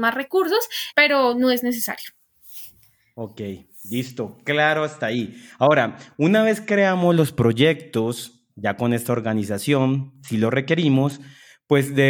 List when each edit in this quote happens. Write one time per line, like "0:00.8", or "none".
0:00.9